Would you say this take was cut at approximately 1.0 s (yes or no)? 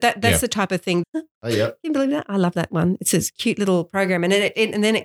yes